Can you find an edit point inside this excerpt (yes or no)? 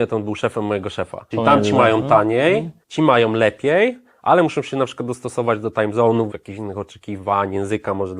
yes